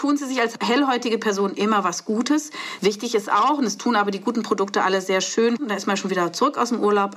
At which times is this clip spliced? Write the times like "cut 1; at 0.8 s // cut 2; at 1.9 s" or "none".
cut 1; at 2.8 s // cut 2; at 5.6 s